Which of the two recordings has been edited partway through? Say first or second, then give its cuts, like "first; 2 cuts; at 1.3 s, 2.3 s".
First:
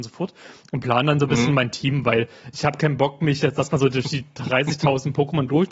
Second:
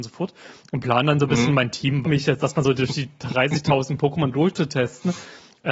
second; 1 cut; at 2.0 s